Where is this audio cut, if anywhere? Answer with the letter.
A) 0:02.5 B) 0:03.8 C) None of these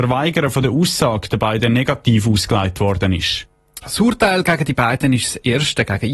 B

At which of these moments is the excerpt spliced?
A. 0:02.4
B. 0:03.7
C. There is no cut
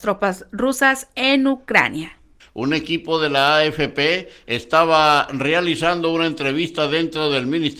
A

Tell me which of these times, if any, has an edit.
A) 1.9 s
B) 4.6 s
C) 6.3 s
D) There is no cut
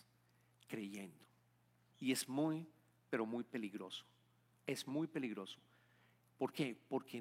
A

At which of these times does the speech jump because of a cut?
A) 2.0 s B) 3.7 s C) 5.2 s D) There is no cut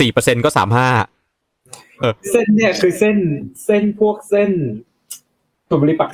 A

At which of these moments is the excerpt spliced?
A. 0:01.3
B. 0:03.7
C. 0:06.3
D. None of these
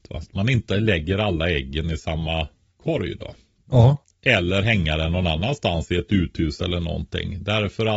B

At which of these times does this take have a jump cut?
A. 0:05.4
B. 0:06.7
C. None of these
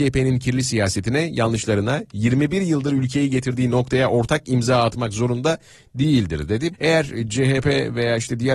B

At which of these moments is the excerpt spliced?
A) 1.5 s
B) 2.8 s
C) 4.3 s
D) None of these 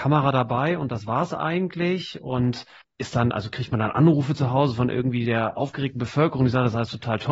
B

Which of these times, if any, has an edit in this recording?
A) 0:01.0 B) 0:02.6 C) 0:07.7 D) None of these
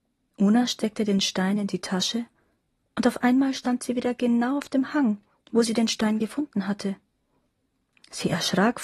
D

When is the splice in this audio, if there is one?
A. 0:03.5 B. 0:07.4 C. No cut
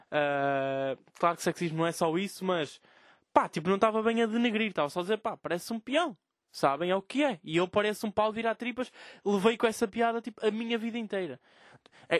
C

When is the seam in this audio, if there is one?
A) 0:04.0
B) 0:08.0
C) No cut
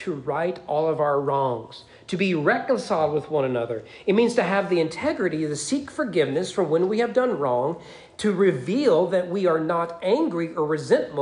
C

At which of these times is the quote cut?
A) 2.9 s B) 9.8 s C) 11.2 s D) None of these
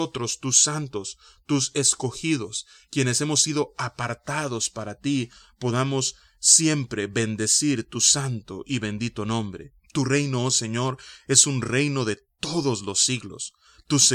B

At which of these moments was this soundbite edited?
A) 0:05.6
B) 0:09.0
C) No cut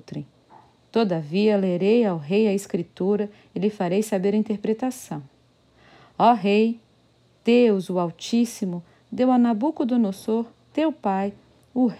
C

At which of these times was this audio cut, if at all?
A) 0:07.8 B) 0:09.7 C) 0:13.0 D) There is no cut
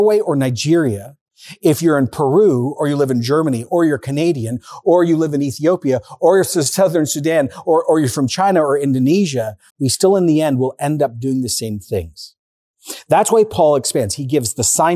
B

